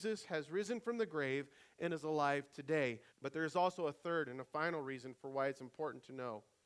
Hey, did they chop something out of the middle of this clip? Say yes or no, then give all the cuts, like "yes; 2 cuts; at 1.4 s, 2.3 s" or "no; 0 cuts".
yes; 1 cut; at 3.1 s